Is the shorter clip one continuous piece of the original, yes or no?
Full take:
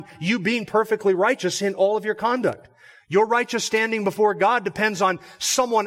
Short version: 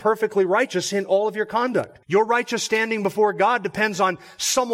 no